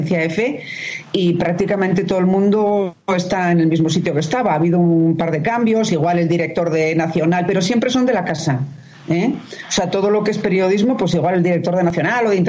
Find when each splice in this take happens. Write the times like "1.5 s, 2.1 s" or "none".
none